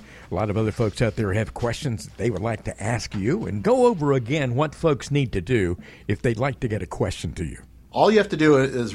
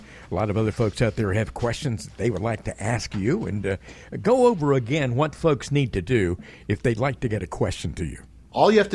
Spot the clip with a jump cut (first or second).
first